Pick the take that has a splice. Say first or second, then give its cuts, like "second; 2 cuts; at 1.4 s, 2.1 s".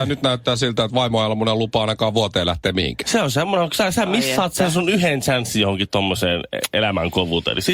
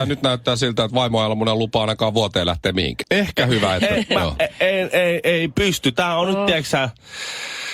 second; 1 cut; at 3.0 s